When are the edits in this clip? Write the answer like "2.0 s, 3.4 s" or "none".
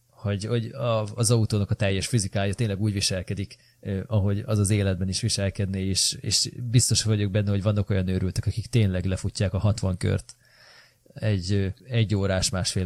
11.8 s